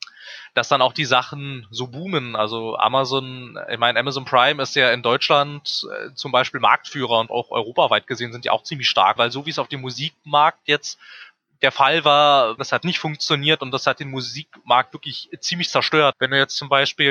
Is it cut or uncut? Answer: cut